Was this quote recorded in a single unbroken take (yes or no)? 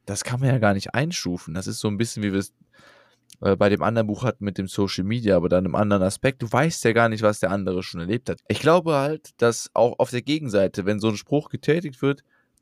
no